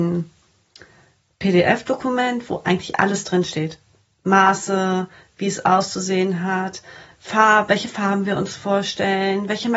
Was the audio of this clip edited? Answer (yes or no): yes